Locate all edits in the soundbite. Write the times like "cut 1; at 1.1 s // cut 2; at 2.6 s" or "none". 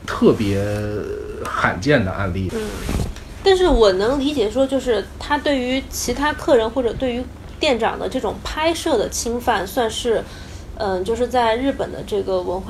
cut 1; at 2.5 s